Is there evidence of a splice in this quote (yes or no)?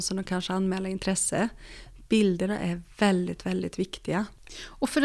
no